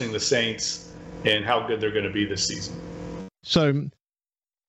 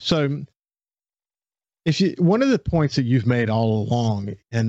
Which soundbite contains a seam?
first; 1 cut; at 3.4 s

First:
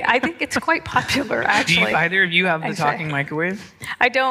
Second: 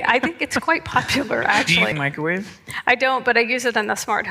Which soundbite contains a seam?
second; 1 cut; at 1.9 s

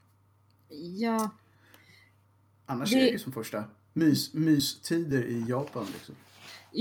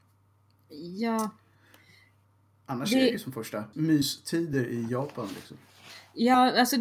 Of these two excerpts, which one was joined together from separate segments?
second; 1 cut; at 3.7 s

